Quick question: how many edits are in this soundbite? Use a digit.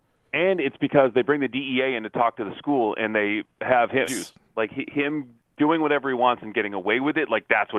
1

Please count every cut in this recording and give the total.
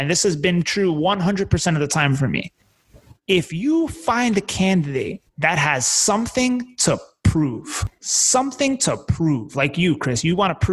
1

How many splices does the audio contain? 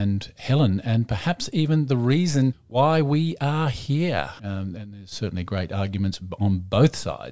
0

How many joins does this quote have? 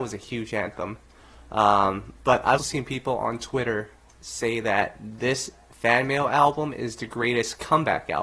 1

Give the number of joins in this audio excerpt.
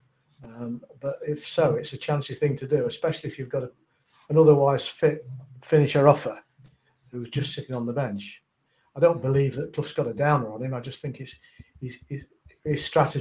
0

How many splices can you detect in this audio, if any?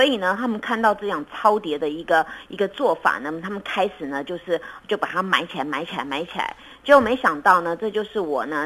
0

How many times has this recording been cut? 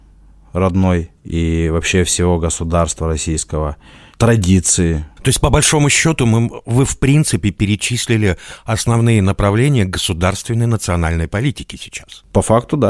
2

